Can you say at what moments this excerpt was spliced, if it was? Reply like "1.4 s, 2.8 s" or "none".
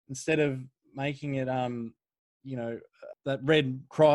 3.1 s